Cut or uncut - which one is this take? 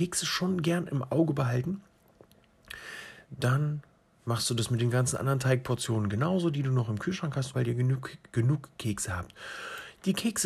cut